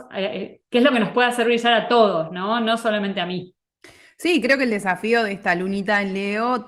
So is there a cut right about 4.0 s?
no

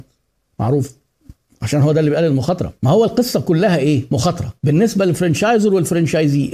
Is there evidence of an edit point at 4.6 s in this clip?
yes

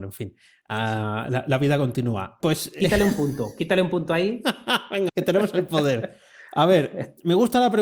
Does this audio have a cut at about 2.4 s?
yes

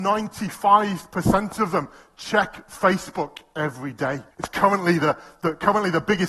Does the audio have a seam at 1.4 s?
no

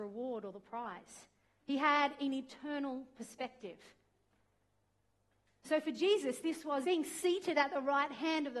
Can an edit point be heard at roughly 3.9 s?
no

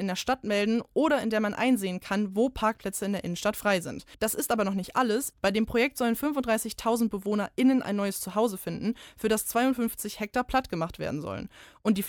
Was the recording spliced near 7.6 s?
no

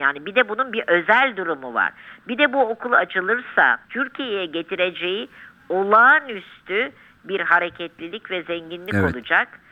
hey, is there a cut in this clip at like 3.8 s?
yes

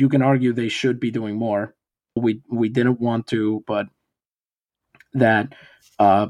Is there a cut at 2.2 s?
yes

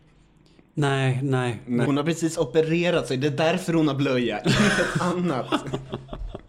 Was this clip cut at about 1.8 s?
yes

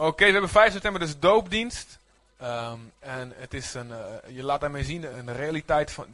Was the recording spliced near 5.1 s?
yes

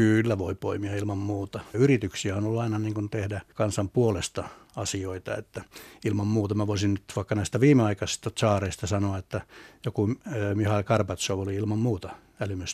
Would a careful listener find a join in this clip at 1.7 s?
yes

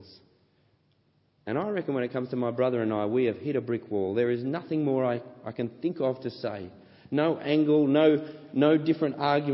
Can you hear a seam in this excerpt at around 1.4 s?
yes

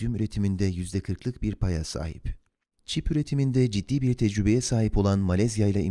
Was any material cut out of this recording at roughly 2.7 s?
yes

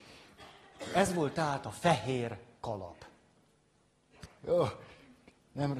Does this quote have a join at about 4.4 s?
yes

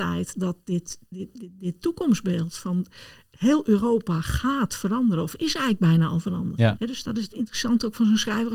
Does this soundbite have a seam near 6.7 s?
yes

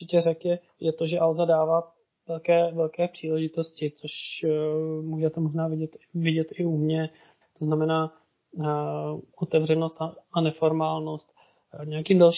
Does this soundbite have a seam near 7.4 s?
yes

